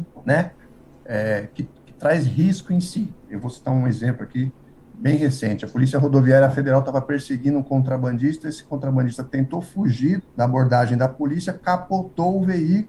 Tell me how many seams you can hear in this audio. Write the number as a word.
two